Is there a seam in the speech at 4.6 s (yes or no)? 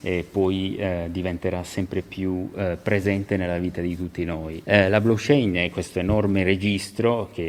yes